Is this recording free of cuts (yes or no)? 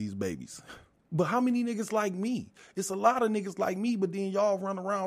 no